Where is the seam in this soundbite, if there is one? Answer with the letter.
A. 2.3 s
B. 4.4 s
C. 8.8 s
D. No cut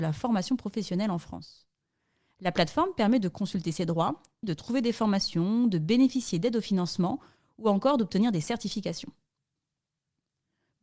B